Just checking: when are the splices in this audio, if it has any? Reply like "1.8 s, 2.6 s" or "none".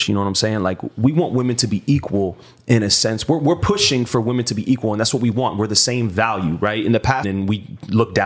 7.2 s